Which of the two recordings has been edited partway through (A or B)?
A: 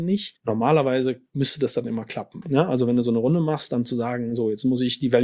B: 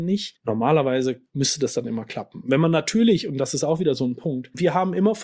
A